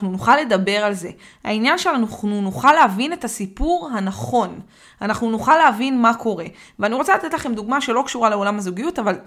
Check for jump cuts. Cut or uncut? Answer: uncut